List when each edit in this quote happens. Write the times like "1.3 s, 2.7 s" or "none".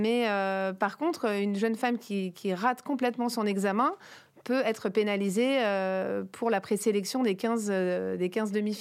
none